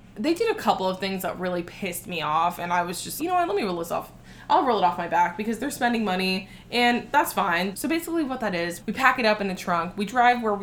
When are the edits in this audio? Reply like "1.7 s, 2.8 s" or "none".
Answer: 3.2 s, 7.7 s, 8.8 s